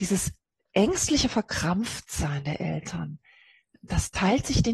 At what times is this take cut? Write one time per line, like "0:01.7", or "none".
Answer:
none